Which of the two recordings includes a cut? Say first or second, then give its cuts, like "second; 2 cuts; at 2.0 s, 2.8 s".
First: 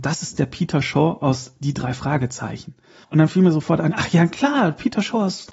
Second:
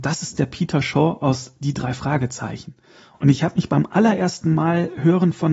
first; 1 cut; at 3.0 s